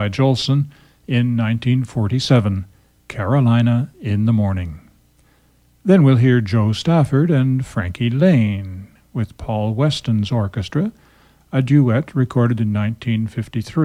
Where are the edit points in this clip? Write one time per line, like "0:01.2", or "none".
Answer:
none